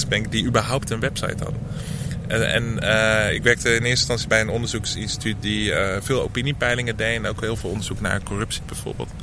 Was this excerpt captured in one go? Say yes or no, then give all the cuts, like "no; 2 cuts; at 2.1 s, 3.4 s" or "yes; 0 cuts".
yes; 0 cuts